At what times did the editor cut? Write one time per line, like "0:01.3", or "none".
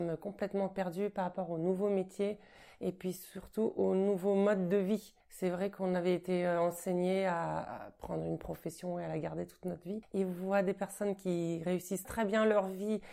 0:05.2
0:10.0
0:12.0